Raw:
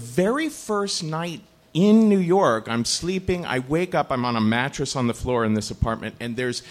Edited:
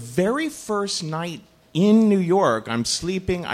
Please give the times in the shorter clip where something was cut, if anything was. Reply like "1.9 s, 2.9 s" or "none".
none